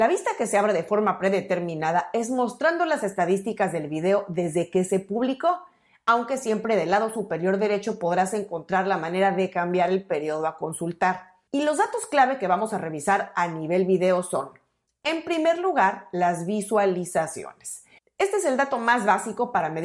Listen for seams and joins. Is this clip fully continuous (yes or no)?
yes